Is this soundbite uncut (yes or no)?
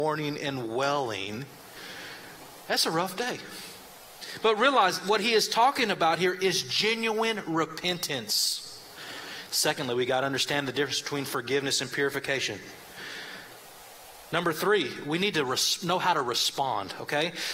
no